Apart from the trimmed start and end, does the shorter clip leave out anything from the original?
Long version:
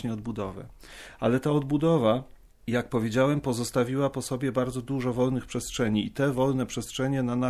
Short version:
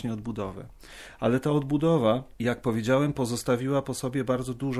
yes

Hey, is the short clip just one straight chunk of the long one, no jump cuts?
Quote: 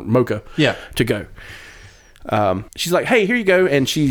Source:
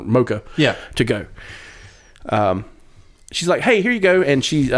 no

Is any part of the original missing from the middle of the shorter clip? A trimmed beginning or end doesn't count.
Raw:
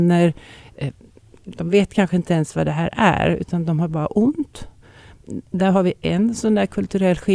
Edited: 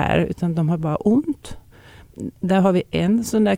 no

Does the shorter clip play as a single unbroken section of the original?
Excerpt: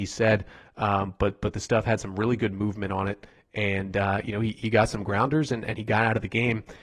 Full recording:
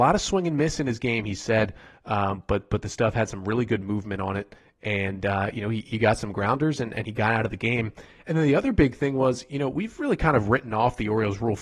yes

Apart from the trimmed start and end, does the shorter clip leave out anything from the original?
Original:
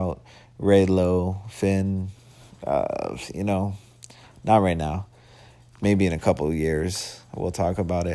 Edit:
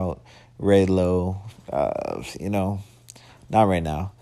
yes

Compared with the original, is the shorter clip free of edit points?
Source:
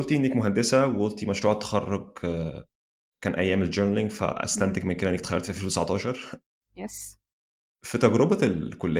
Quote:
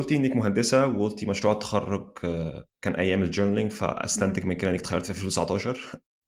no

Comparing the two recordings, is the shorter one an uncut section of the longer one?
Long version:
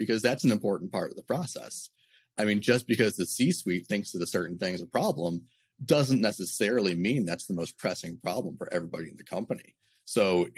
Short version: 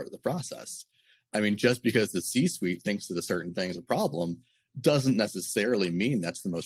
yes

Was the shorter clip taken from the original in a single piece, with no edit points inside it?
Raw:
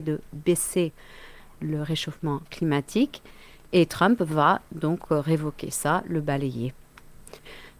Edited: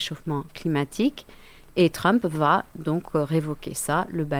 yes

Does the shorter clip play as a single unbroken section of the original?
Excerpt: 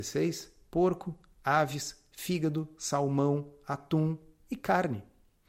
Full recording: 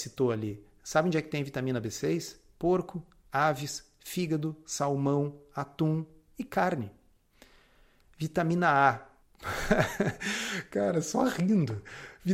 yes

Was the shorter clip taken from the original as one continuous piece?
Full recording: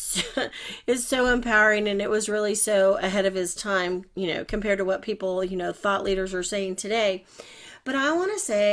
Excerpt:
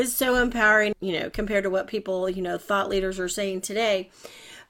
no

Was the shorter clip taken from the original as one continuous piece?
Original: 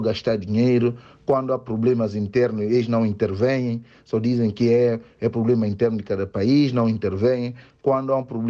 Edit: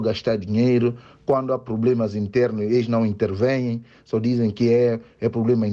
yes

